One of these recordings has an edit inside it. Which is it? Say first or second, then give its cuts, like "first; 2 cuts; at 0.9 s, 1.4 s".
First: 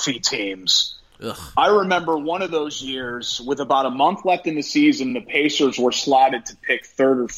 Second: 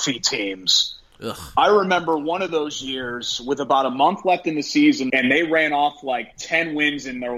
second; 1 cut; at 5.1 s